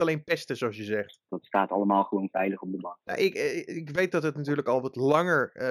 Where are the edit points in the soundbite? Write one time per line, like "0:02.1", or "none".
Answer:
0:01.3